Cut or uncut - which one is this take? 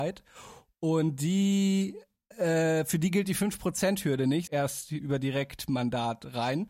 cut